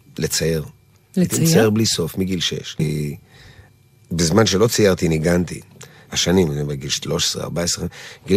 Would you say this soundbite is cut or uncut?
cut